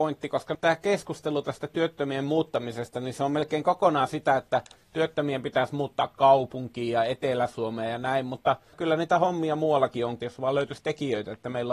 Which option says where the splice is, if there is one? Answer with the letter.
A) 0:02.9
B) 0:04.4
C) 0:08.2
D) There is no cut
D